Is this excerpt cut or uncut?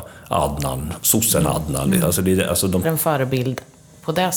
cut